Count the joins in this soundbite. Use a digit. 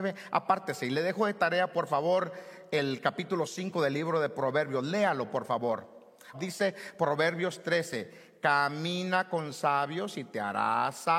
1